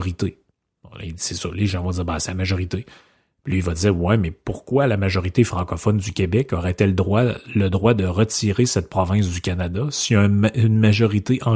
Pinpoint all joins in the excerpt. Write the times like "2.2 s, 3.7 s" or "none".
none

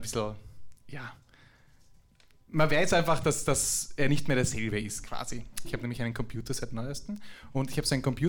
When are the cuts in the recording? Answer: 5.6 s

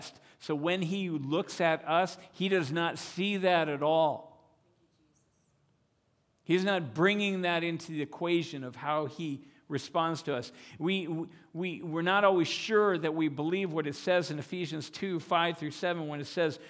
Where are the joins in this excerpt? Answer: none

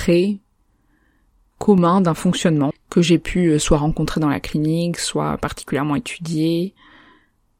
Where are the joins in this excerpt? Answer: 2.7 s

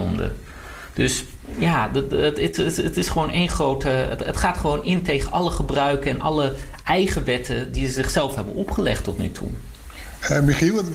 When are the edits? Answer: none

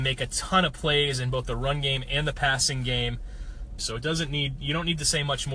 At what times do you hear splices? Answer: 3.8 s

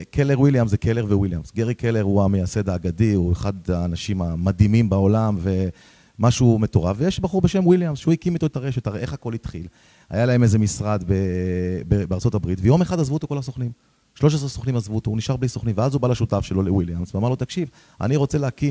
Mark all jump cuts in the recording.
none

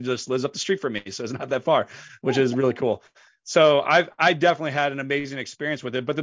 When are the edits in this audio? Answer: none

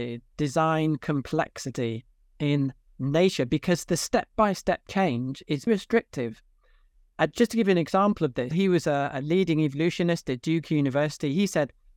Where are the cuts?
5.7 s, 8.5 s

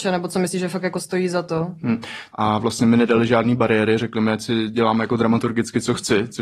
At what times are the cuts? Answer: 2.3 s

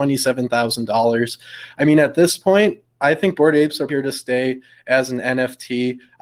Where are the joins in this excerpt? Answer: 3.9 s

